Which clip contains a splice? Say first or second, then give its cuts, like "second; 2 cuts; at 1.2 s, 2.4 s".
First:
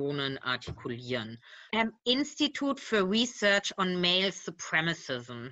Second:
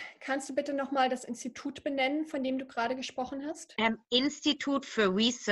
first; 1 cut; at 1.7 s